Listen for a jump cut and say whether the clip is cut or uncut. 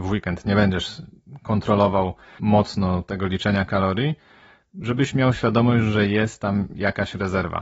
uncut